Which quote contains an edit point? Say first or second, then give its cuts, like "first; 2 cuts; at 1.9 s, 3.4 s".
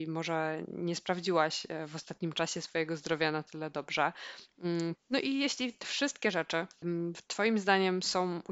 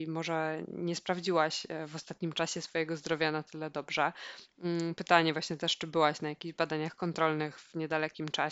first; 2 cuts; at 5.0 s, 6.8 s